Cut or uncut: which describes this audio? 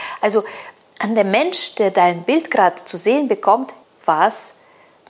cut